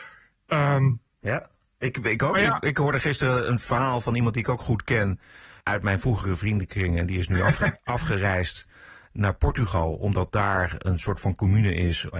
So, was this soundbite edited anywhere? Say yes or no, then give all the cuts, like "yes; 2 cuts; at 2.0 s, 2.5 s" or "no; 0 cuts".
no; 0 cuts